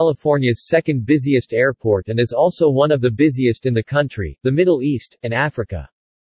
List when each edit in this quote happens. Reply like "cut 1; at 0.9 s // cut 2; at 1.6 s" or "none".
cut 1; at 4.4 s